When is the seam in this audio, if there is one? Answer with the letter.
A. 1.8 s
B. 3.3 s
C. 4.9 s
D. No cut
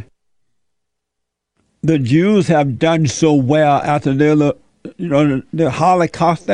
D